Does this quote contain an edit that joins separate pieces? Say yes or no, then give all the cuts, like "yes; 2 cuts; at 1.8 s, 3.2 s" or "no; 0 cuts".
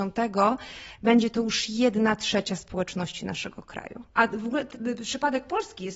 yes; 1 cut; at 4.1 s